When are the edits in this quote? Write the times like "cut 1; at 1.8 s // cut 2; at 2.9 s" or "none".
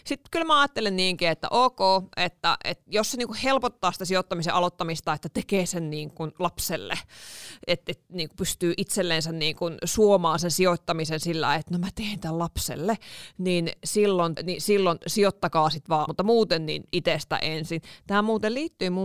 cut 1; at 14.4 s // cut 2; at 16.1 s